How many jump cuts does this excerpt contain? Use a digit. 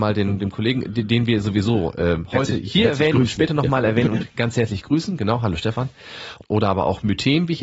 1